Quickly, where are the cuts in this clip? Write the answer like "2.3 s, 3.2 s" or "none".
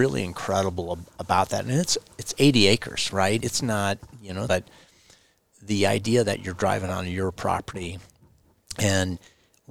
3.4 s, 4.5 s